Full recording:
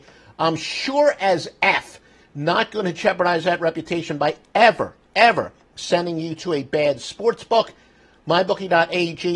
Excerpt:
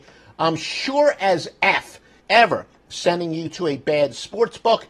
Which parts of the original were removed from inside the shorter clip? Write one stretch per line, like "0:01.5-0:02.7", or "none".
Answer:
0:02.2-0:05.0

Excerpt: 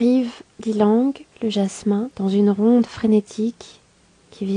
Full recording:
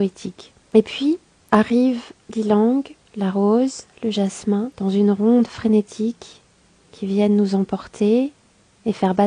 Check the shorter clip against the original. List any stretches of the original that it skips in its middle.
0:03.0-0:03.9

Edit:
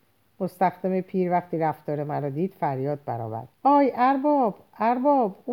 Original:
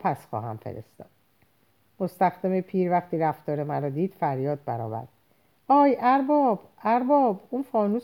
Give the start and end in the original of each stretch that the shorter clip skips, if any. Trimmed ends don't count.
0:05.1-0:05.6

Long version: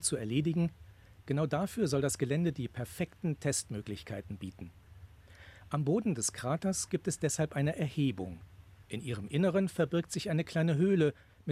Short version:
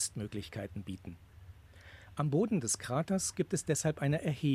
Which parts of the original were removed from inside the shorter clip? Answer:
none

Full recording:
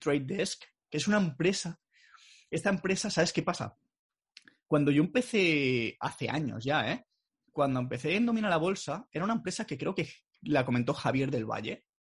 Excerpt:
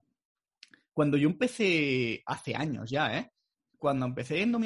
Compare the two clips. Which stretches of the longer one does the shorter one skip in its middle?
none

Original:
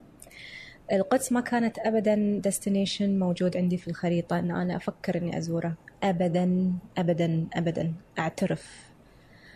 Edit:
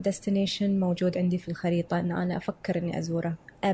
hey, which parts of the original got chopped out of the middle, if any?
none

